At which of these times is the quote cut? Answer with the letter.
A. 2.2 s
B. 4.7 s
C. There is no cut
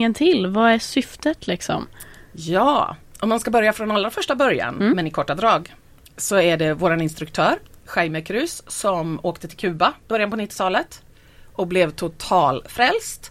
C